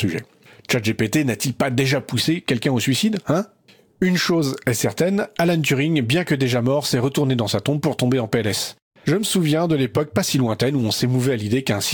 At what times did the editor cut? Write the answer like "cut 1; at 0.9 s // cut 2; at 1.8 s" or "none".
none